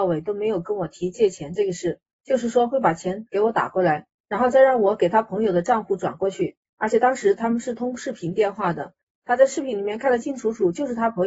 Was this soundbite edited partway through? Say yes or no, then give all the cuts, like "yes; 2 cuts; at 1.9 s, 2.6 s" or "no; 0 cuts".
yes; 1 cut; at 10.2 s